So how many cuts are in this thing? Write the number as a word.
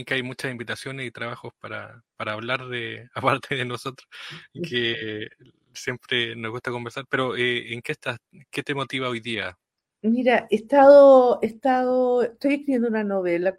zero